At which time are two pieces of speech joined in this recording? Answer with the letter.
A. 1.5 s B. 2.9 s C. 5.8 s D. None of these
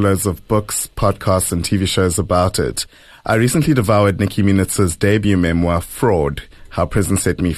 D